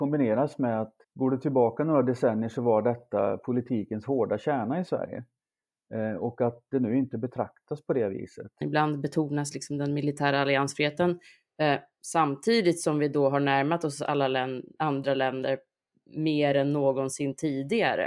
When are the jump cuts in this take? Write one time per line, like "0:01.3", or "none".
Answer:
0:01.0
0:08.6